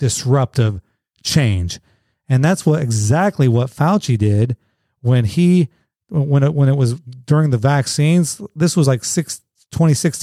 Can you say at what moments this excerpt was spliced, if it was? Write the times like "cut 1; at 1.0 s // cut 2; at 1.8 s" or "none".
none

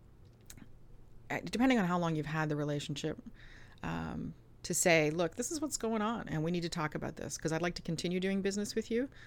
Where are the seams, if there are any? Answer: none

